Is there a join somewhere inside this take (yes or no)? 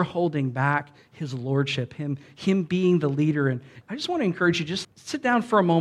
yes